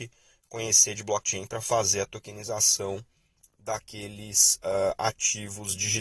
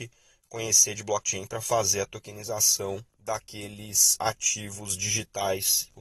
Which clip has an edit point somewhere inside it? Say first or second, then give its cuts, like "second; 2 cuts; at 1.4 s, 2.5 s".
second; 2 cuts; at 3.1 s, 4.2 s